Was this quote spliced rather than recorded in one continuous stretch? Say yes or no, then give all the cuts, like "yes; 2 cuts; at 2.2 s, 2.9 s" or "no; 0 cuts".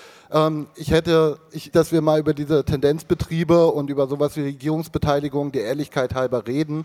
yes; 1 cut; at 1.7 s